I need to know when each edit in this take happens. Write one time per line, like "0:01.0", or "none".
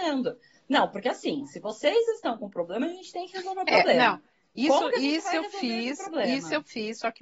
none

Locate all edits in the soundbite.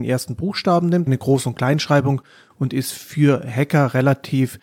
0:01.1

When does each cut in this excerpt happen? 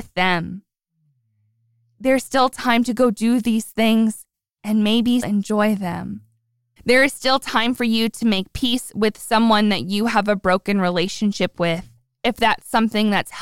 0:05.2
0:06.8

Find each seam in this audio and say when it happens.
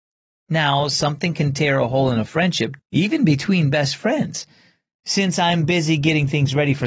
0:02.8
0:05.0

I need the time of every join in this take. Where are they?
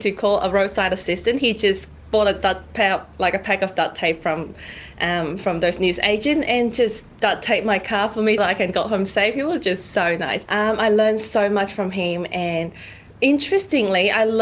0:08.4
0:10.5
0:13.1

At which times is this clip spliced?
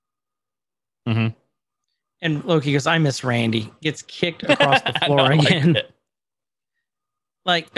none

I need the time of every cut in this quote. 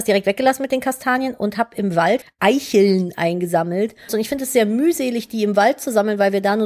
0:02.2
0:04.1

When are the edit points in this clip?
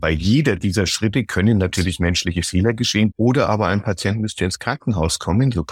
0:03.1

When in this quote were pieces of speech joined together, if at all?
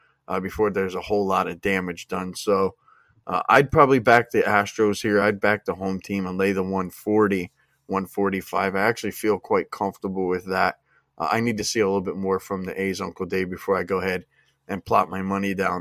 none

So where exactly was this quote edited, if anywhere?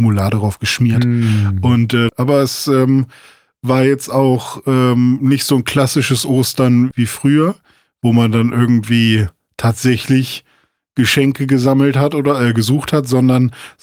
0:02.1
0:06.9

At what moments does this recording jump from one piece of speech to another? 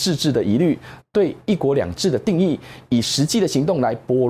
0:01.0

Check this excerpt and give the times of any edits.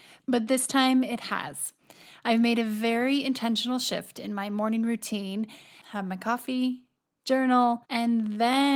0:05.8
0:07.2

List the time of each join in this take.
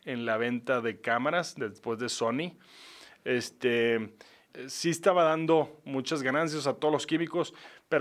0:04.5

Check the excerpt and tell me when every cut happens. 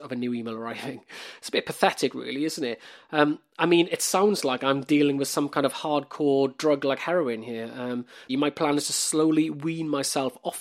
0:08.3

